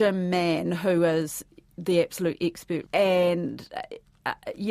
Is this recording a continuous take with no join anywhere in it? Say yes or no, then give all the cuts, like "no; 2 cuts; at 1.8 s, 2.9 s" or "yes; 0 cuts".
no; 1 cut; at 2.8 s